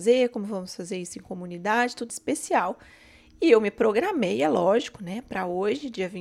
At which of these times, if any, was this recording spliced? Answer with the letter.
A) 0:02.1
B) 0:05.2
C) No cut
A